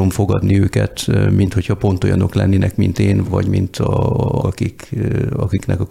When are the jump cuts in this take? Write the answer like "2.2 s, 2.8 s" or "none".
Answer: 3.2 s, 4.4 s